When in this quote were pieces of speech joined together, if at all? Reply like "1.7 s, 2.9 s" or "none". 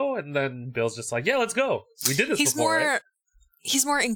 1.9 s